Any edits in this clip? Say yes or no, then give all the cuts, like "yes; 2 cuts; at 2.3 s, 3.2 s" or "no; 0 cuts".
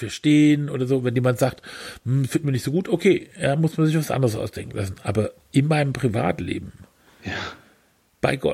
no; 0 cuts